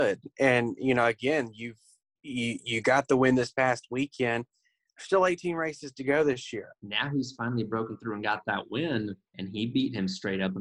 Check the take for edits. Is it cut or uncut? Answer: cut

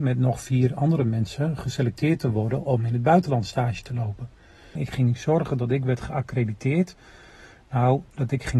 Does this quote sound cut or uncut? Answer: cut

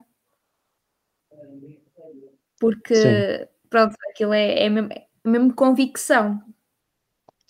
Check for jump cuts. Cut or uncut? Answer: uncut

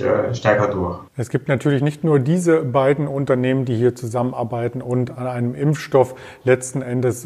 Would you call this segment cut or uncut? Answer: cut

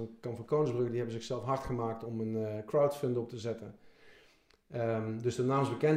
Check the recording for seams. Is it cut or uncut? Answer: uncut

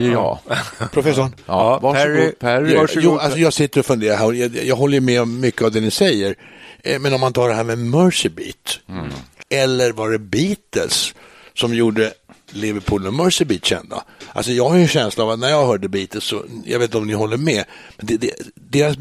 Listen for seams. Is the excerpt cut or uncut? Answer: cut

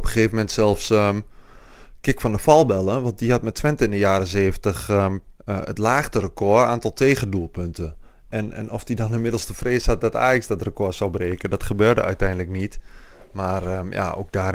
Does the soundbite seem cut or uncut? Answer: cut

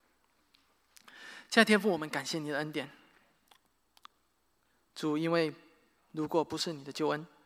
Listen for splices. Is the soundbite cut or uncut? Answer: uncut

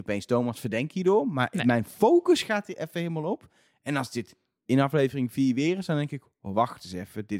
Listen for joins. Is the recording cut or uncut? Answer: uncut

